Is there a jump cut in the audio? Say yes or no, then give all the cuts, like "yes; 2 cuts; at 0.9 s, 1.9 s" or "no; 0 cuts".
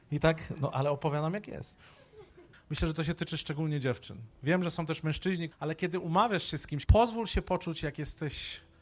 yes; 3 cuts; at 2.5 s, 5.5 s, 6.8 s